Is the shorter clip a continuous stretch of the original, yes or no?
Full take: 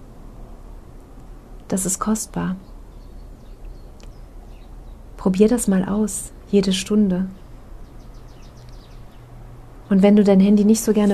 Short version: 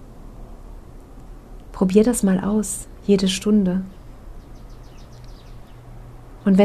no